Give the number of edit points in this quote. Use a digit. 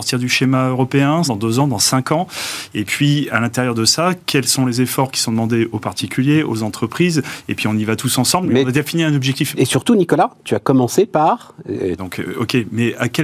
3